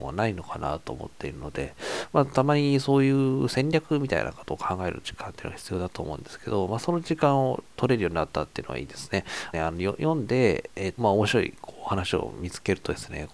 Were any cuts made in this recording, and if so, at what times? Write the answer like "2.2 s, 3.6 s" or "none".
9.5 s, 11.0 s